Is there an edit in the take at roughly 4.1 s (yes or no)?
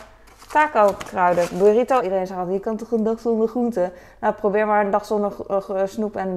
no